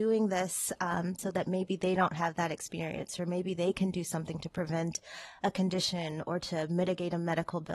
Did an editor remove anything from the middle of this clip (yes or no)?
yes